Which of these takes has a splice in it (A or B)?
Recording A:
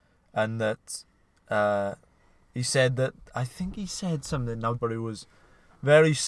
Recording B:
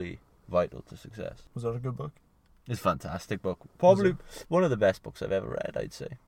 A